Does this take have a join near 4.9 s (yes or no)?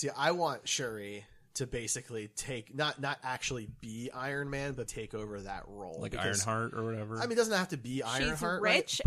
yes